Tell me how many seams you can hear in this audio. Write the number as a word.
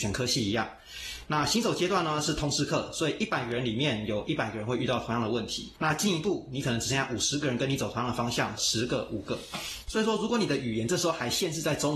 two